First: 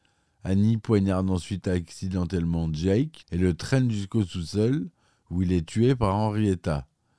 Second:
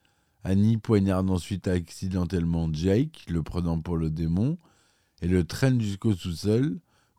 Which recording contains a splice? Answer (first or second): first